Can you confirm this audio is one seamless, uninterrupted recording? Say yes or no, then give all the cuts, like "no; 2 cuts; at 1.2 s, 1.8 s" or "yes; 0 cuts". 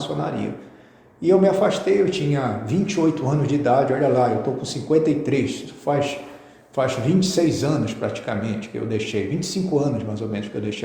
yes; 0 cuts